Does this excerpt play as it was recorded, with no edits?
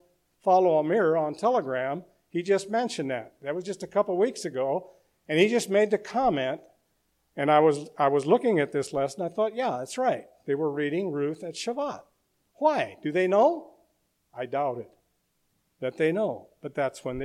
yes; 0 cuts

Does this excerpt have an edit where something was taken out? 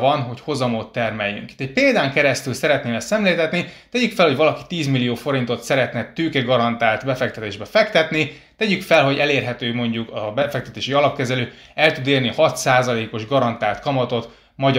no; 0 cuts

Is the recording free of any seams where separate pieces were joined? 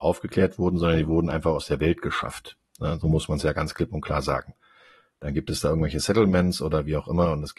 no; 1 cut; at 3.0 s

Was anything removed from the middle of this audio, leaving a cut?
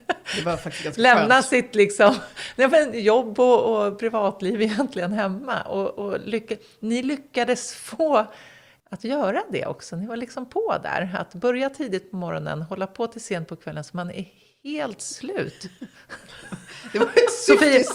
no; 0 cuts

